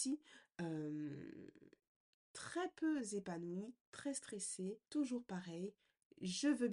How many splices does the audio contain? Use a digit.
1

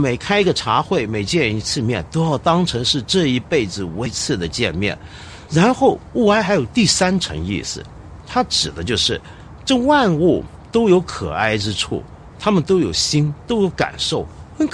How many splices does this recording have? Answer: 2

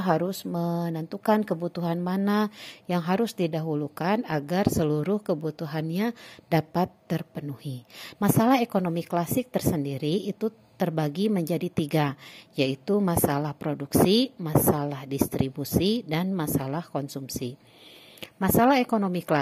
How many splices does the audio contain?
1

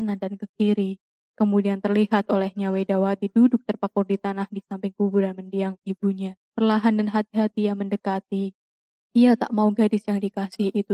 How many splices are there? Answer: 1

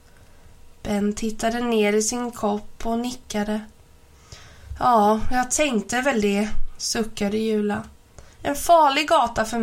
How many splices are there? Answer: 0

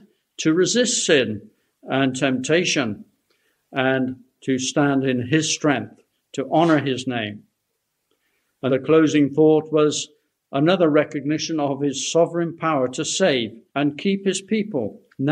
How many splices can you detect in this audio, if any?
2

